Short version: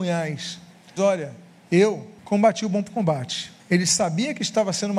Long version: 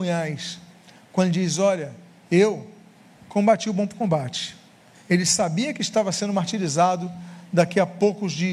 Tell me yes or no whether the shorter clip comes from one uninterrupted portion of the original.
no